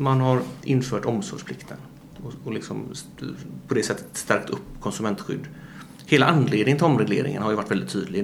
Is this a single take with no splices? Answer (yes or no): yes